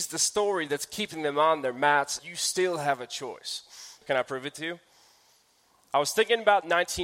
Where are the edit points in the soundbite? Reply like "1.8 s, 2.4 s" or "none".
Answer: 2.2 s, 4.0 s